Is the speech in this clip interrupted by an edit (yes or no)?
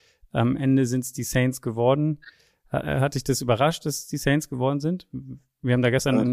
no